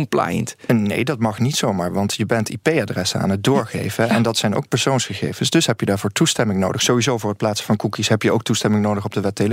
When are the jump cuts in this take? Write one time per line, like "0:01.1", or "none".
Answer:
none